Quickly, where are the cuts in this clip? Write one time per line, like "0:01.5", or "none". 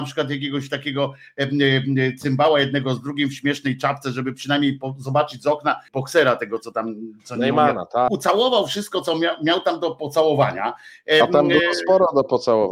0:05.9
0:08.1